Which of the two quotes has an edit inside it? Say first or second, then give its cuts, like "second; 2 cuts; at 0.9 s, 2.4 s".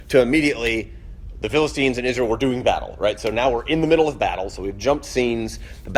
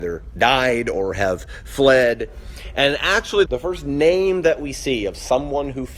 second; 1 cut; at 3.5 s